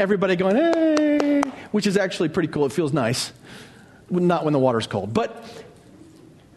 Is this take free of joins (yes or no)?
yes